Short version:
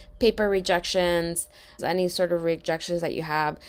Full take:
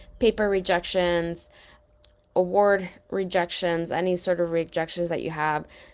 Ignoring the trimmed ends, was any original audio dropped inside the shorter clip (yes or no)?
yes